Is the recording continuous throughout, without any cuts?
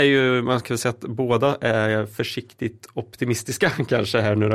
yes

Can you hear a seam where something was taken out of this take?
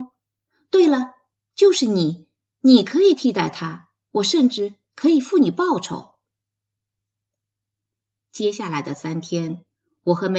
no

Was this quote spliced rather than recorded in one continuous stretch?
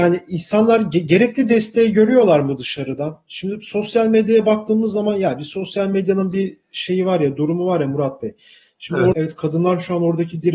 yes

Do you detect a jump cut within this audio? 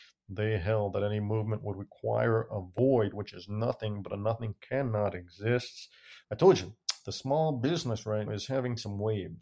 yes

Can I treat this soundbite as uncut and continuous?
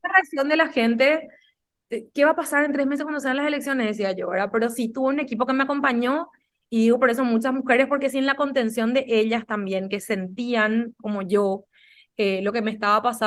yes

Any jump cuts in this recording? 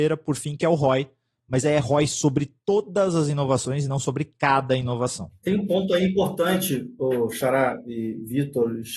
no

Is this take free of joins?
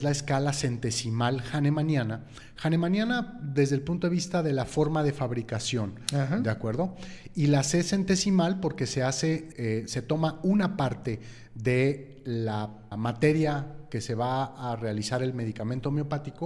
no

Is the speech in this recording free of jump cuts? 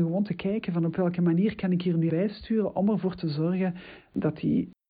no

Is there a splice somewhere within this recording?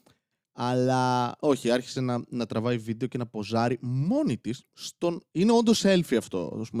no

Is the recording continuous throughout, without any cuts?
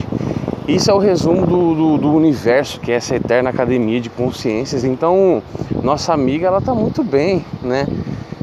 yes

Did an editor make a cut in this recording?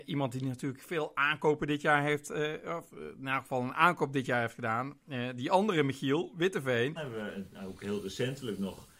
yes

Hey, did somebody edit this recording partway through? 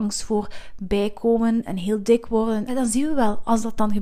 yes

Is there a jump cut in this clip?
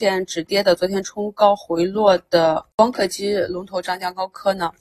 no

